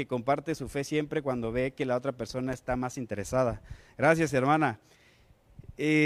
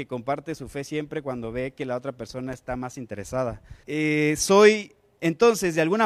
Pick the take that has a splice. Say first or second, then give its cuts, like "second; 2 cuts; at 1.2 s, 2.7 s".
second; 1 cut; at 3.8 s